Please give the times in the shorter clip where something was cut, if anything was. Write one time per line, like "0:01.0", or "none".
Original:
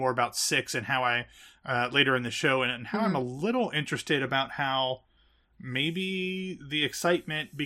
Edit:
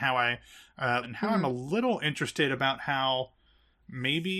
0:01.0